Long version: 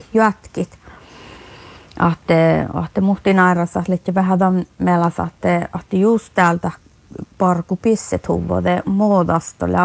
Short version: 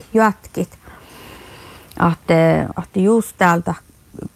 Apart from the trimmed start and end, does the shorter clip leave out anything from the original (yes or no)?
yes